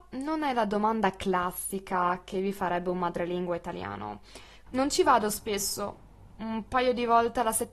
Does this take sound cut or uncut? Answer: cut